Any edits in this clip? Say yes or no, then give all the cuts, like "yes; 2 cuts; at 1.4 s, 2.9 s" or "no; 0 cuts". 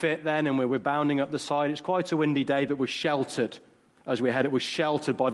no; 0 cuts